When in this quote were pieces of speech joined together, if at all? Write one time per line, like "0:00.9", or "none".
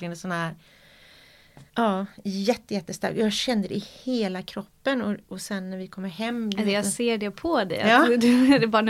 0:01.7